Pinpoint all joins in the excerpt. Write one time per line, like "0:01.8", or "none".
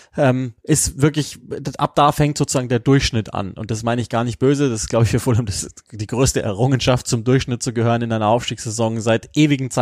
none